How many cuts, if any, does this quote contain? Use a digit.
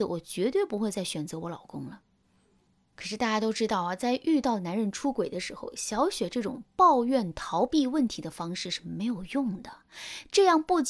0